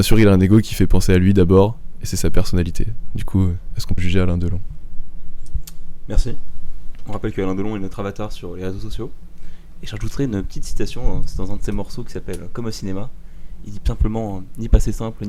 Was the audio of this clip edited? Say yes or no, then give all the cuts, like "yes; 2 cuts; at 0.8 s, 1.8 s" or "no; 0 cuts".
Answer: yes; 1 cut; at 4.0 s